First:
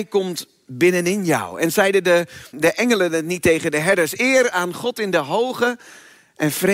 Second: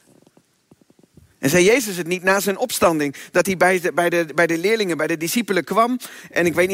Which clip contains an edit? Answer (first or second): first